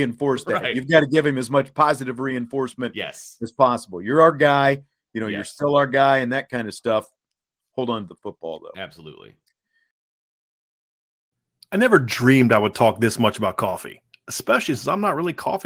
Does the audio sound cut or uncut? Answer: uncut